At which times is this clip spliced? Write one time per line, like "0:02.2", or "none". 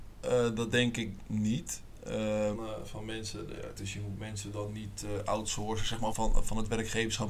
0:02.5
0:03.8
0:06.1

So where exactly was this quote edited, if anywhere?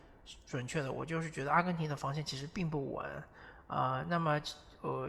none

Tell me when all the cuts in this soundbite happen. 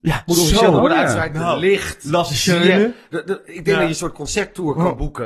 none

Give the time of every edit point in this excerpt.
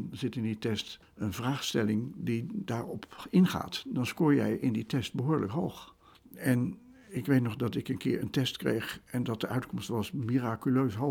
none

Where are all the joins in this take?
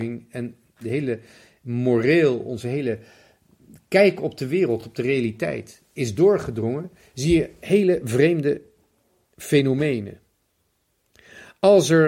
none

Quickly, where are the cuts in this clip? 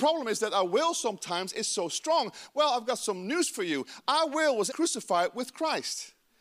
0:04.7

